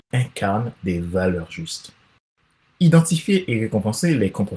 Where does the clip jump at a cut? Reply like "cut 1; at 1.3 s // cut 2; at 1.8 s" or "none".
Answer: cut 1; at 2.6 s